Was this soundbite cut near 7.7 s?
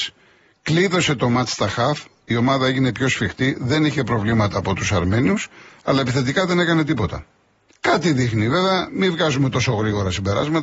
yes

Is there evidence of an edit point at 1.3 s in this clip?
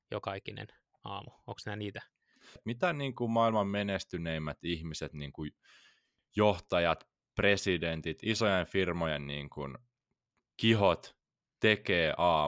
no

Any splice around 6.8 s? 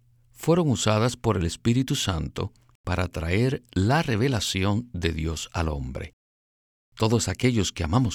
no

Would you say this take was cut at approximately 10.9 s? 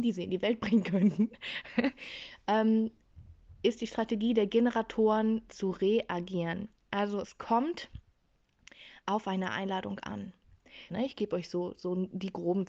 yes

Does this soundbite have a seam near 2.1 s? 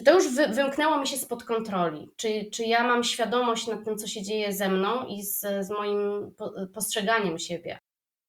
no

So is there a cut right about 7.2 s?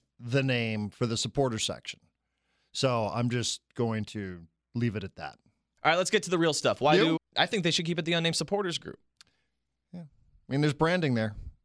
yes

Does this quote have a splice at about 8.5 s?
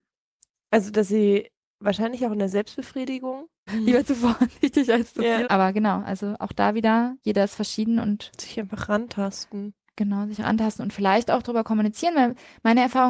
no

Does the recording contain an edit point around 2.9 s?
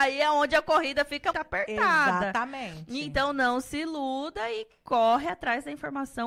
no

